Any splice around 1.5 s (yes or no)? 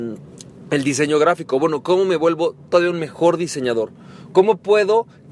no